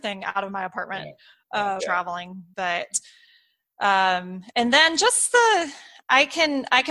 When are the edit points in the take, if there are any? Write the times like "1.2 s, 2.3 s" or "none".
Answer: 1.8 s